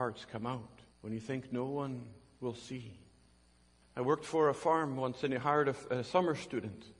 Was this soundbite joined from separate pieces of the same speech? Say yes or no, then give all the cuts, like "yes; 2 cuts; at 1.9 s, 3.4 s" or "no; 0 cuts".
yes; 2 cuts; at 0.9 s, 3.8 s